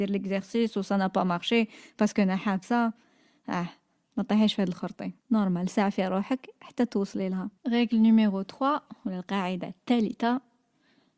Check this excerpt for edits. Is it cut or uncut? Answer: cut